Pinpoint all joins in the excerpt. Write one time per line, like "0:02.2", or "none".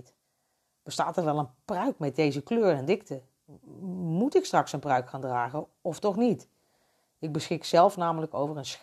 none